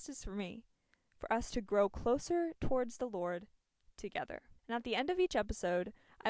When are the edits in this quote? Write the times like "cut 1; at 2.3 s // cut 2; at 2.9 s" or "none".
cut 1; at 4.6 s

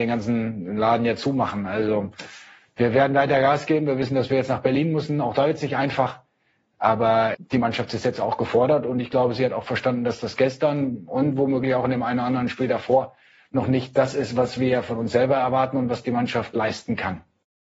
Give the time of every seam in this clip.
cut 1; at 7.3 s

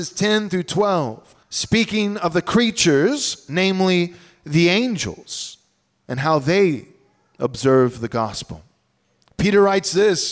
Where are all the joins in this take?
cut 1; at 1.4 s

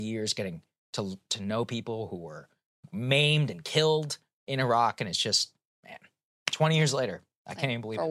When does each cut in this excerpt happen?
none

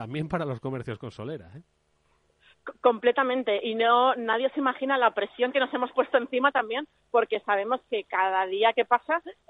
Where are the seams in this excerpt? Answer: none

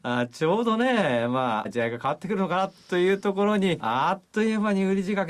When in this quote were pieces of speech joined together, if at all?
cut 1; at 1.6 s // cut 2; at 3.8 s

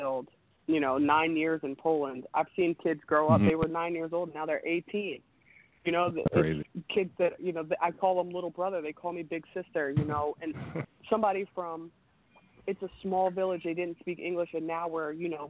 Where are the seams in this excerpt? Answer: none

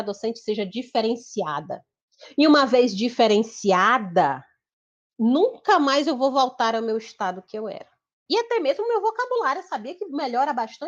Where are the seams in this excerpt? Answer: cut 1; at 8.3 s

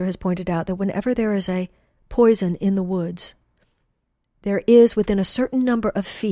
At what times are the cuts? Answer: none

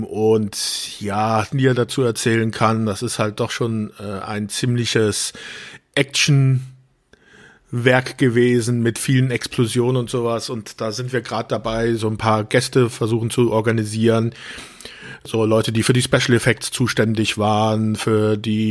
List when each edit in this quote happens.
cut 1; at 1.5 s

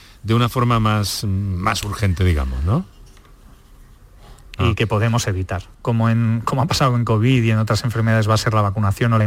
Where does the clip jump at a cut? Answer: cut 1; at 4.6 s // cut 2; at 5.7 s

